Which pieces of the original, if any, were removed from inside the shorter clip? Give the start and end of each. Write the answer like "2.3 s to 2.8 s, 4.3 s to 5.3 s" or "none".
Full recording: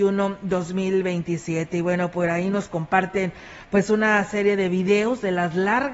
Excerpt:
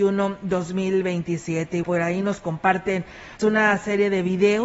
1.8 s to 2.1 s, 3.7 s to 3.9 s